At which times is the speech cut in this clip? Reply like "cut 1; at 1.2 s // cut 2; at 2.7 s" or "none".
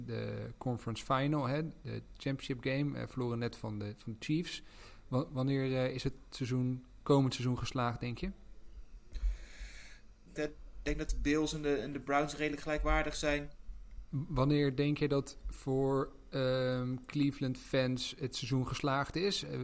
cut 1; at 10.4 s // cut 2; at 14.1 s

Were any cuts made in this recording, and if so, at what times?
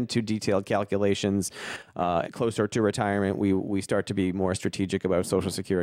cut 1; at 2.2 s

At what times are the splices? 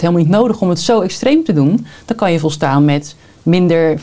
none

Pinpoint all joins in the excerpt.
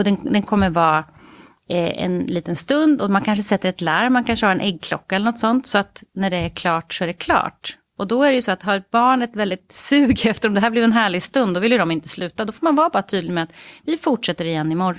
none

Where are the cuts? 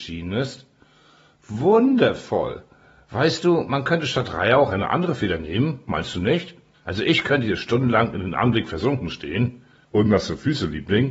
cut 1; at 6.7 s // cut 2; at 9.8 s

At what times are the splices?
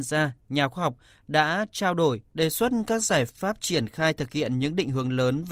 cut 1; at 2.3 s

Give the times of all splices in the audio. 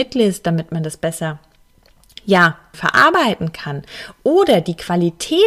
cut 1; at 2.7 s

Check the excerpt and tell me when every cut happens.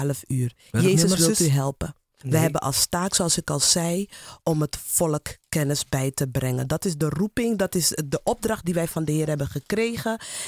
cut 1; at 2.2 s

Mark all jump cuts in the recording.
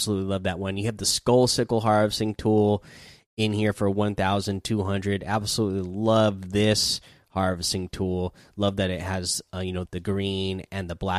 cut 1; at 9.8 s

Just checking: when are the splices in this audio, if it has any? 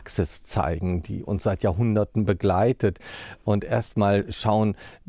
none

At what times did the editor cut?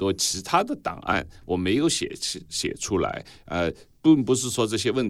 none

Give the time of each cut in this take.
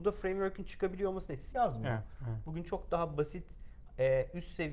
cut 1; at 1.5 s

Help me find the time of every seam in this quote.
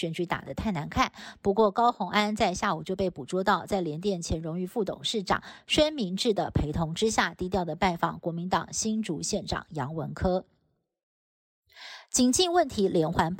none

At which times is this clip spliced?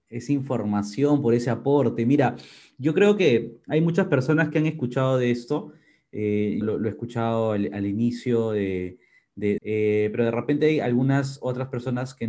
cut 1; at 6.6 s // cut 2; at 9.6 s

